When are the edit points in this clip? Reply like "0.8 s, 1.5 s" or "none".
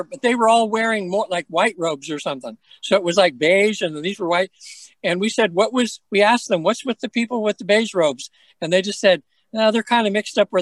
none